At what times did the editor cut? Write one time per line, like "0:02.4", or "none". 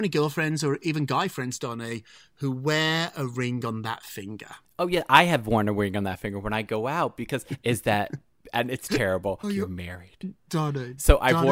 0:07.5
0:09.4